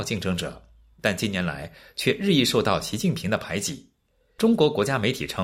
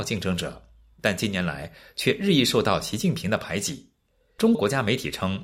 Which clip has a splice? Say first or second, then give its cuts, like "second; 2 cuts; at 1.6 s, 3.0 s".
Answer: second; 1 cut; at 4.5 s